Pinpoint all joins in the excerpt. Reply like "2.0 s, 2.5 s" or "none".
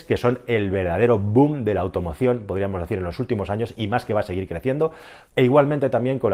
5.3 s